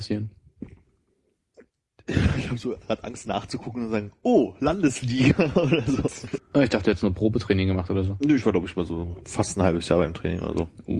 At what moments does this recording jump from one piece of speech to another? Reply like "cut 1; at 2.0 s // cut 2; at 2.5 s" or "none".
cut 1; at 6.4 s